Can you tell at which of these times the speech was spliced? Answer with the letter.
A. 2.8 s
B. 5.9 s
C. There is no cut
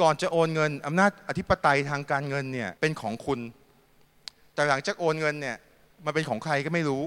A